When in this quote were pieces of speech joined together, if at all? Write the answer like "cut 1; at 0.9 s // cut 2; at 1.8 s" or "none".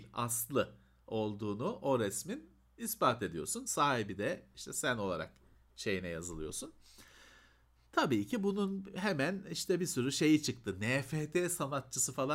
none